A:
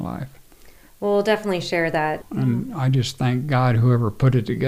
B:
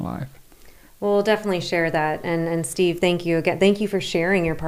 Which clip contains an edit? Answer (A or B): A